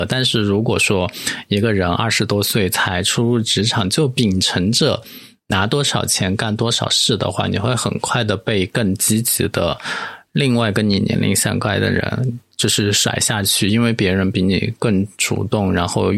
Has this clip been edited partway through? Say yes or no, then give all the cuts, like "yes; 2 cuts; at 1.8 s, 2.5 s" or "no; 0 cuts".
no; 0 cuts